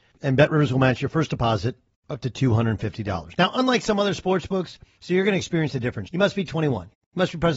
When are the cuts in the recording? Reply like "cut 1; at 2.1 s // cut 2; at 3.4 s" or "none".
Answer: cut 1; at 5.0 s // cut 2; at 6.1 s